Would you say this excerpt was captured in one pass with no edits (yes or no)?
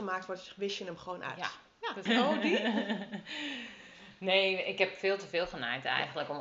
no